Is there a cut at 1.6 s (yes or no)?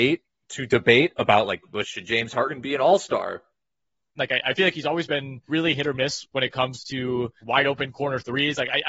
no